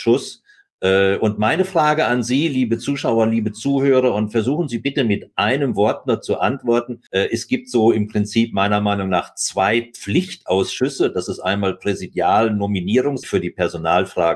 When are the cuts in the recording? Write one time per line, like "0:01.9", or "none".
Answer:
0:07.1
0:13.2